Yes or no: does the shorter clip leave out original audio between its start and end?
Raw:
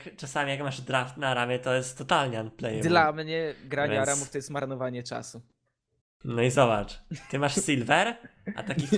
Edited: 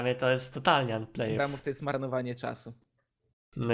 yes